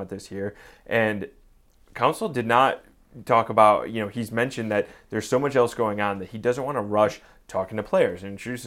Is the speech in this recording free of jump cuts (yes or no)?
yes